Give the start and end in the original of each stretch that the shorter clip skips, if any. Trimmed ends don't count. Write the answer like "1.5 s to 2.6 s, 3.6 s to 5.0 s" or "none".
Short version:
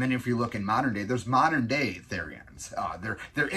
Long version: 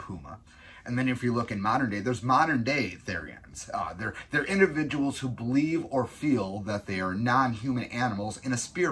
none